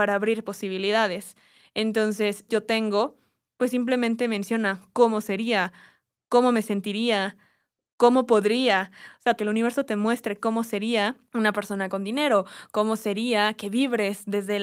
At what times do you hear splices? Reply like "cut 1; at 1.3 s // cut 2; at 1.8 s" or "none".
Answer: cut 1; at 2.5 s // cut 2; at 9.4 s // cut 3; at 11.3 s